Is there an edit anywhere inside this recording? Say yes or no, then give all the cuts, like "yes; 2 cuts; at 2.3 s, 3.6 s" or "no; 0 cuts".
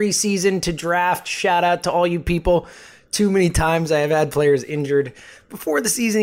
no; 0 cuts